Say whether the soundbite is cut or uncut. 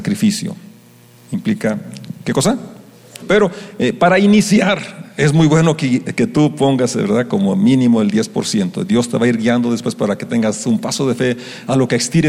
cut